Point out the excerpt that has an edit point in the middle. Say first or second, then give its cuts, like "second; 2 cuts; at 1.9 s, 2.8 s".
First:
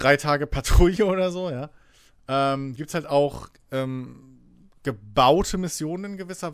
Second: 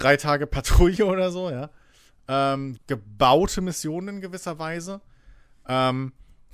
second; 1 cut; at 2.8 s